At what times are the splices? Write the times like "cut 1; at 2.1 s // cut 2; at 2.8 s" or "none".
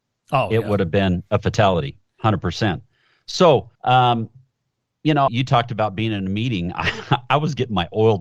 cut 1; at 2.1 s // cut 2; at 3.7 s // cut 3; at 5.3 s